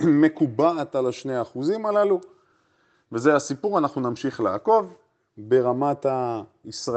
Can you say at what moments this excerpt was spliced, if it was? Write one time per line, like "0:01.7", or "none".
none